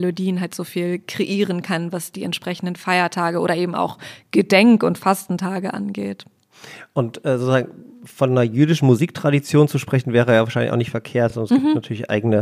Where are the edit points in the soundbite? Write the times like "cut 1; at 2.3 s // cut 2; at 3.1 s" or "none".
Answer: none